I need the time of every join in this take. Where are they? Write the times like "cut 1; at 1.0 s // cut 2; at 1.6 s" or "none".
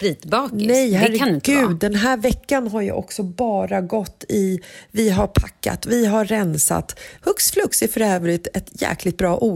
cut 1; at 7.2 s

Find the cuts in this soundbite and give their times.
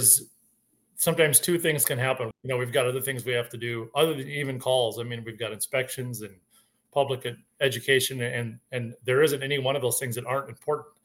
cut 1; at 2.3 s

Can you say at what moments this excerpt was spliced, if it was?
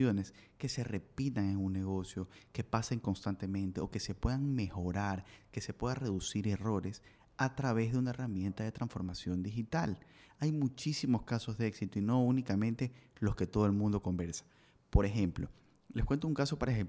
none

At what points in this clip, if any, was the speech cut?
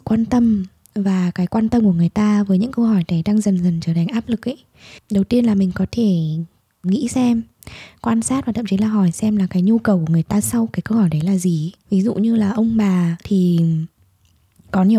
cut 1; at 6.8 s // cut 2; at 11.8 s // cut 3; at 13.2 s

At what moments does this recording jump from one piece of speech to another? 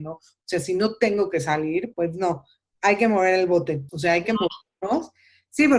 cut 1; at 1.9 s // cut 2; at 3.9 s

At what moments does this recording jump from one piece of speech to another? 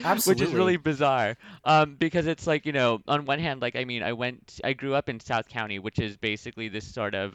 none

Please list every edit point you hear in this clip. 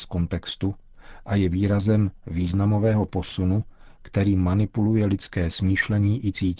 none

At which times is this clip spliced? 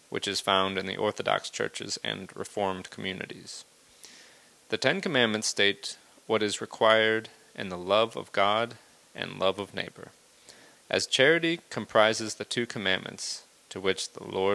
cut 1; at 10.7 s

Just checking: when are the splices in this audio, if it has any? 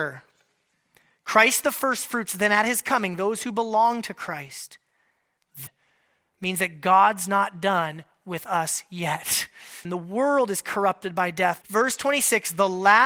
cut 1; at 5.7 s // cut 2; at 9.8 s // cut 3; at 11.6 s

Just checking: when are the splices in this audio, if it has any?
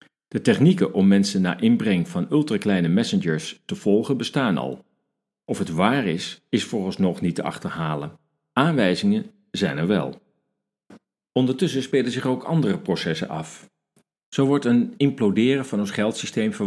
none

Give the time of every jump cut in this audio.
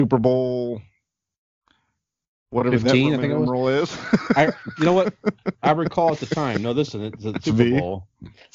cut 1; at 7.4 s

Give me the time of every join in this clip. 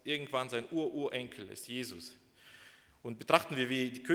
none

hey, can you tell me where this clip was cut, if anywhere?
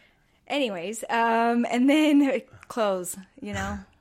none

